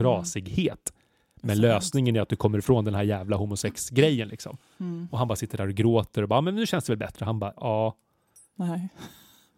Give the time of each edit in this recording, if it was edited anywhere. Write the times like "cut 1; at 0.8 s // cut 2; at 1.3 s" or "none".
cut 1; at 7.5 s